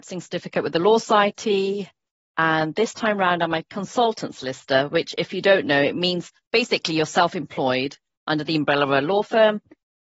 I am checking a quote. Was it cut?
no; 0 cuts

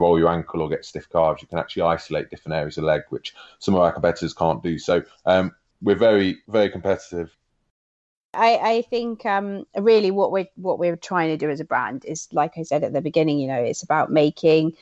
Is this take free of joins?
yes; 0 cuts

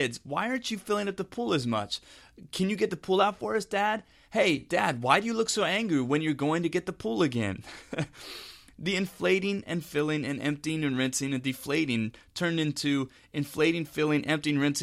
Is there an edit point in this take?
no; 0 cuts

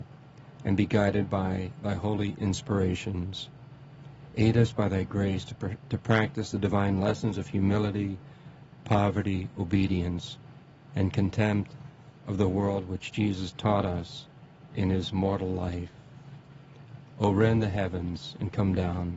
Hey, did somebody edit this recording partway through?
no; 0 cuts

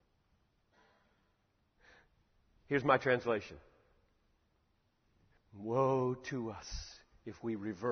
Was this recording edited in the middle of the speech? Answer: yes; 1 cut; at 5.4 s

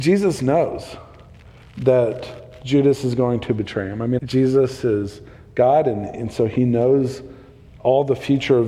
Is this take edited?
yes; 1 cut; at 4.2 s

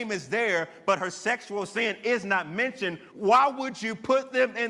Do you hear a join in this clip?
yes; 1 cut; at 3.1 s

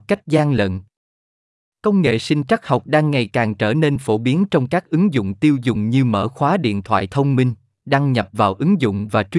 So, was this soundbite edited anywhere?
no; 0 cuts

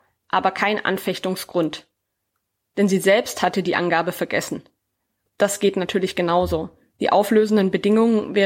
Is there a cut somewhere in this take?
yes; 1 cut; at 5.3 s

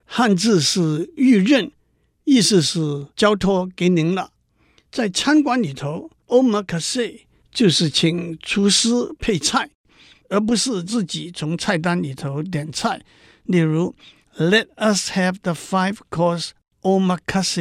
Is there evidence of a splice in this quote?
no; 0 cuts

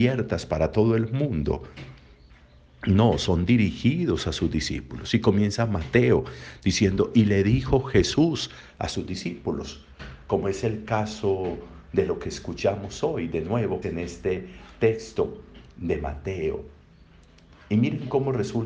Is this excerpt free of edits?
no; 1 cut; at 13.8 s

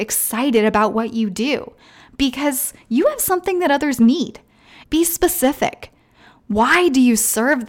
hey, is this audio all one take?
no; 1 cut; at 4.8 s

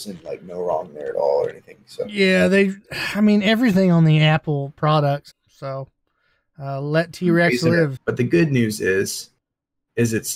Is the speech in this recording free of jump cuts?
no; 2 cuts; at 5.3 s, 8.0 s

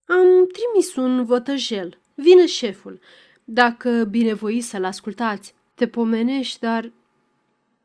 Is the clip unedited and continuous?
no; 2 cuts; at 2.1 s, 5.7 s

